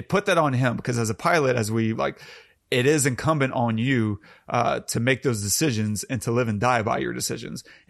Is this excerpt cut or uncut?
cut